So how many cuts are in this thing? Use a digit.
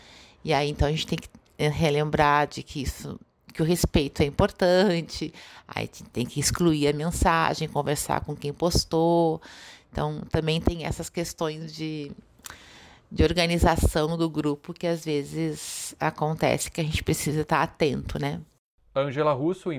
0